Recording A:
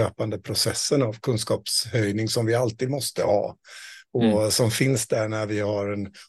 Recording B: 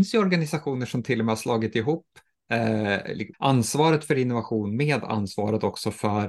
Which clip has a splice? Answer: B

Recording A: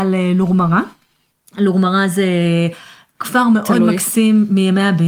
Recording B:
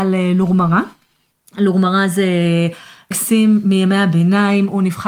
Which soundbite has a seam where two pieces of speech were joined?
B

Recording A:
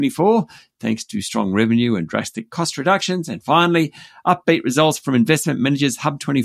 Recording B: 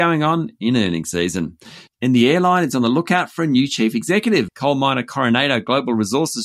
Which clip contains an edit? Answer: B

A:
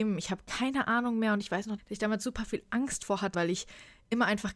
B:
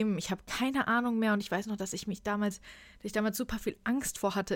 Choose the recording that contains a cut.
A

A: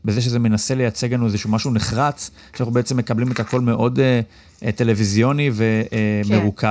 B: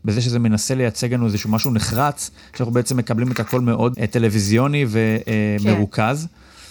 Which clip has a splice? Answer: B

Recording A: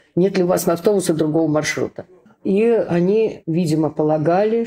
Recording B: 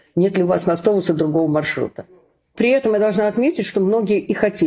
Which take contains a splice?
A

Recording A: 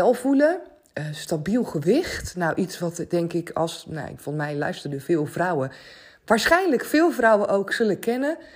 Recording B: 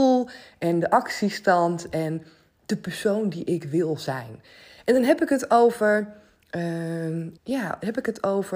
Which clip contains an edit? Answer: B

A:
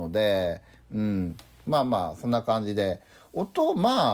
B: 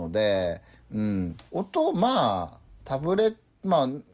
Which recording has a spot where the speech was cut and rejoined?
B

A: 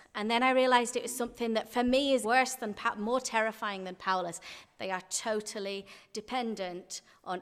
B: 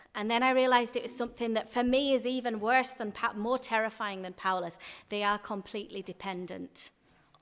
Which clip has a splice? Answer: A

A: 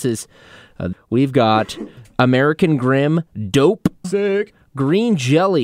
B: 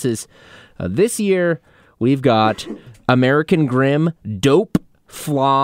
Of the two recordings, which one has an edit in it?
A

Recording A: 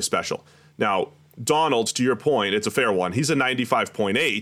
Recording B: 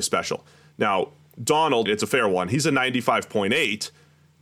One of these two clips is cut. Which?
B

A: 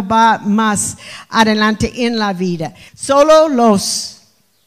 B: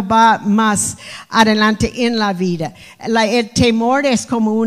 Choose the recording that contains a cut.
A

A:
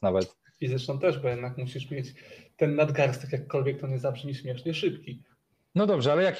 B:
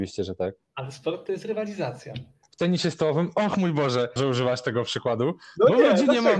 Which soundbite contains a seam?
B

